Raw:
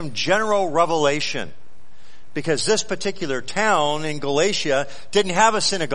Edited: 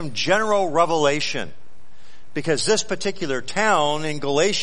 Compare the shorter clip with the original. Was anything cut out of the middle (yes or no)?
no